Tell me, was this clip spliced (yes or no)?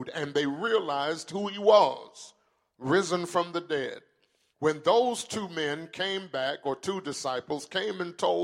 no